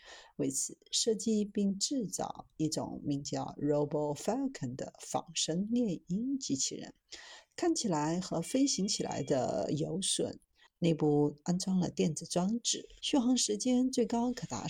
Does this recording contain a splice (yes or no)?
yes